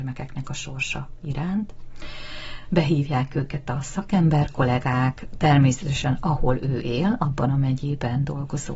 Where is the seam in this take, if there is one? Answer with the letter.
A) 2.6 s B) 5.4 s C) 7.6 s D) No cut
A